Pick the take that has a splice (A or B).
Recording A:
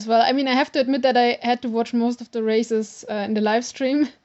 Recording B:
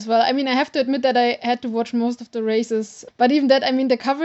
B